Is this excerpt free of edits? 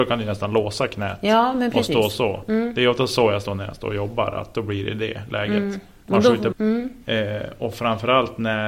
no; 1 cut; at 6.5 s

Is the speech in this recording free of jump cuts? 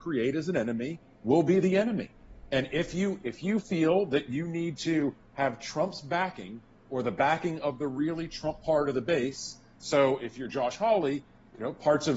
yes; 0 cuts

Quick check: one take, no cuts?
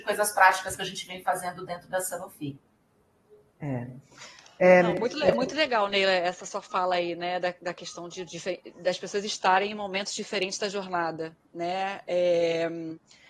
yes; 0 cuts

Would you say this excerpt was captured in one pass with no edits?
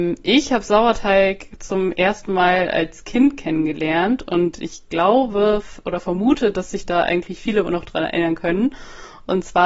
yes; 0 cuts

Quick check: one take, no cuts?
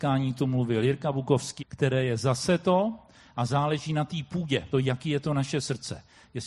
no; 2 cuts; at 1.6 s, 4.7 s

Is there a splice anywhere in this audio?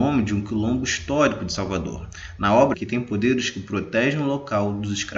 yes; 1 cut; at 2.7 s

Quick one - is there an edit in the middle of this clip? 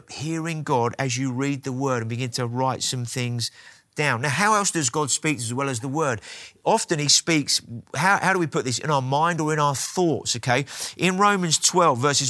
no; 0 cuts

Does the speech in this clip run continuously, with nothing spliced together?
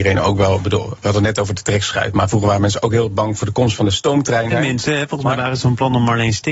no; 1 cut; at 4.5 s

